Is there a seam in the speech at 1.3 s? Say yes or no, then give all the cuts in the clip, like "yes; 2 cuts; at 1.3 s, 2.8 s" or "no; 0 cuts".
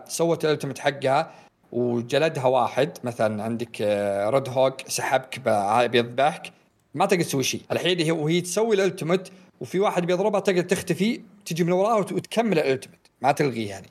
no; 1 cut; at 7.6 s